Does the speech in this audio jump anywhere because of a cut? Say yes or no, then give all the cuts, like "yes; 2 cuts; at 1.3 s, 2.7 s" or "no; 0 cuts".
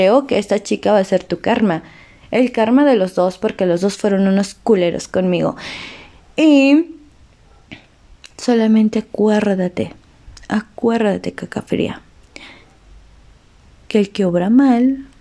no; 0 cuts